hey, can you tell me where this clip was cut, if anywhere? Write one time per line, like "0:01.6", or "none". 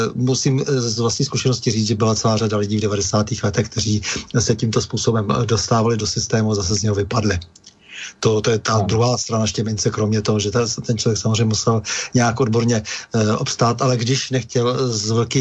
none